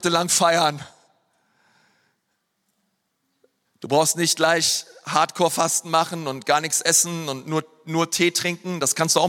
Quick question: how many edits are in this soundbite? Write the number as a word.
one